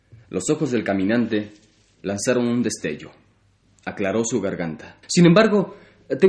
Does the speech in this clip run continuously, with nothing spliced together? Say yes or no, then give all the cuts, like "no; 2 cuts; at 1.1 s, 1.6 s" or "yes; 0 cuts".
no; 1 cut; at 5.0 s